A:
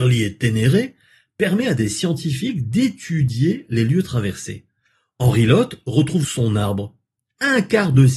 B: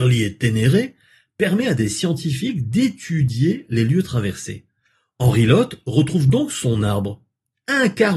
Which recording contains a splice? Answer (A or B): A